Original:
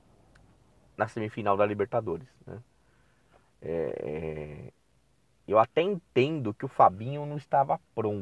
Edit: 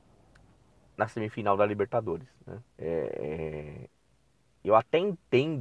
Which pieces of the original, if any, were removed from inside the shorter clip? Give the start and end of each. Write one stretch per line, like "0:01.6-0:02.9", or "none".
0:02.7-0:03.5